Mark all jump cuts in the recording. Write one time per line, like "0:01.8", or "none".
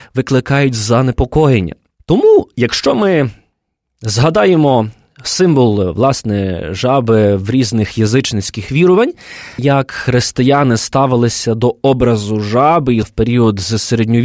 0:09.6
0:13.0